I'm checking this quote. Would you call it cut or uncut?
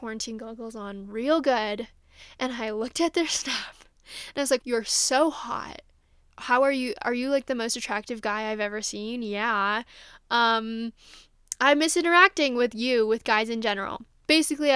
cut